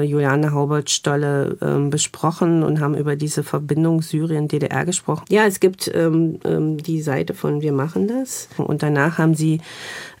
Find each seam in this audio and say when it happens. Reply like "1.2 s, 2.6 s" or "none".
5.2 s, 8.6 s